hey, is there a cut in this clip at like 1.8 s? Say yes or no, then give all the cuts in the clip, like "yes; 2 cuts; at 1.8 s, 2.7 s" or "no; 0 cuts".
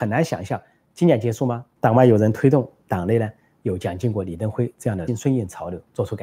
yes; 2 cuts; at 1.8 s, 5.1 s